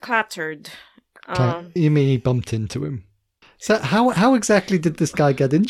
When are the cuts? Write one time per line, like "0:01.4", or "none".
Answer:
0:01.8
0:03.4